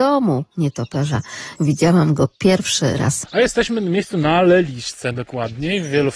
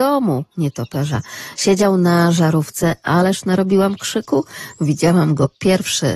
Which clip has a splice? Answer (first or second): first